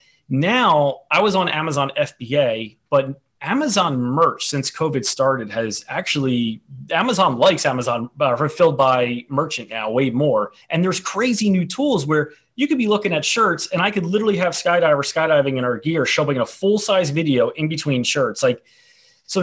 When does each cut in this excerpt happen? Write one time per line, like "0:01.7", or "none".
0:10.6